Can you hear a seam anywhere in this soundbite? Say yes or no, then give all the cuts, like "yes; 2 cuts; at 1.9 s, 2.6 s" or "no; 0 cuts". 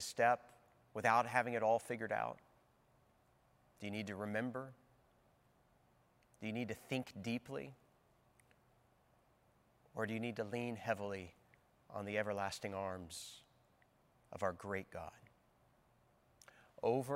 no; 0 cuts